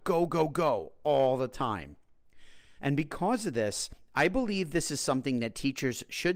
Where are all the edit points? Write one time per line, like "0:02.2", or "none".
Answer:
0:02.8